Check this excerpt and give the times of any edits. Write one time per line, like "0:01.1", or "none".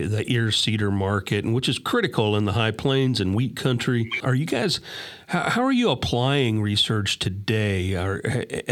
0:04.2